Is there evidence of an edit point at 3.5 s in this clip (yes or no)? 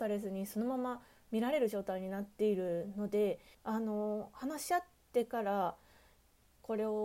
yes